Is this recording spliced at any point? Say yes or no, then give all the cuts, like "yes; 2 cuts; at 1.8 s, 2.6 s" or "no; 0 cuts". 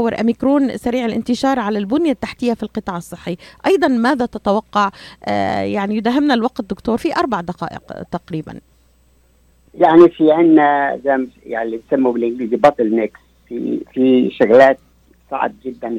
yes; 1 cut; at 7.0 s